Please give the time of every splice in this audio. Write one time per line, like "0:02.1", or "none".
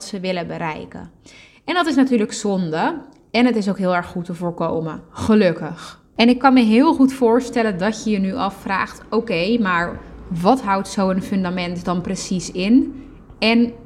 none